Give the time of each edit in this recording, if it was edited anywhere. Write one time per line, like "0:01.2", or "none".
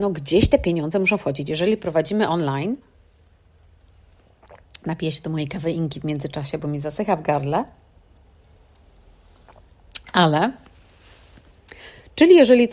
0:01.5

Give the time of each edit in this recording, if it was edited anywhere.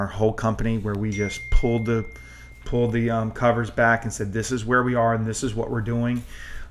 none

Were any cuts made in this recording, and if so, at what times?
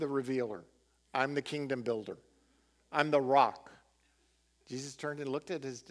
0:04.6

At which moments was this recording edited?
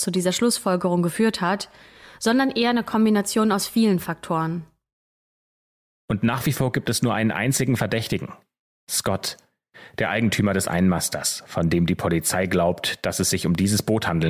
0:05.9

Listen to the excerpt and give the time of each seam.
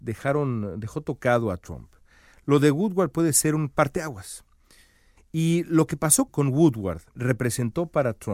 0:05.2
0:06.3

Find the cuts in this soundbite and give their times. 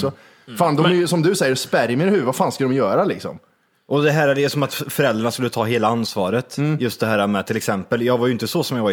none

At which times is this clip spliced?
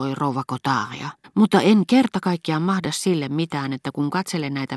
0:01.2

